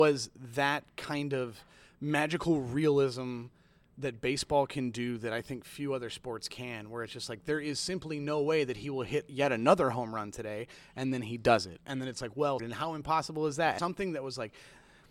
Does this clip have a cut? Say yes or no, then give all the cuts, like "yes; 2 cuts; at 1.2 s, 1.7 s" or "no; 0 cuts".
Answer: yes; 2 cuts; at 12.6 s, 13.8 s